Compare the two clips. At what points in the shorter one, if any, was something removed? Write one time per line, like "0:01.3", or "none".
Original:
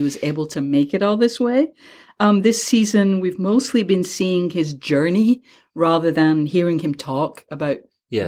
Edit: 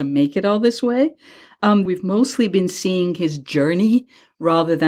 0:01.9